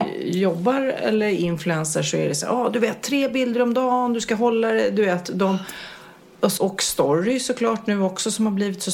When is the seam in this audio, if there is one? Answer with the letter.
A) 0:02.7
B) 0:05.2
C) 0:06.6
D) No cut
C